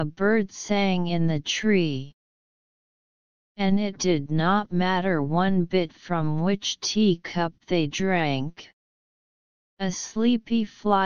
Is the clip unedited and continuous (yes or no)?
no